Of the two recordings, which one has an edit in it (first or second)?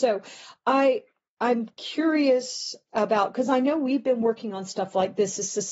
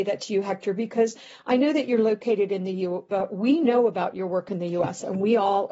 second